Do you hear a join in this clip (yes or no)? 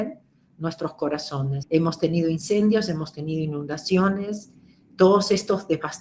yes